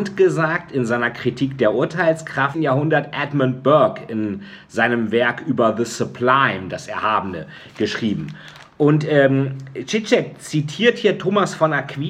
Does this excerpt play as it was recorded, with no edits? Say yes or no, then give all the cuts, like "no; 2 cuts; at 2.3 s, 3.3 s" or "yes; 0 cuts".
no; 1 cut; at 2.5 s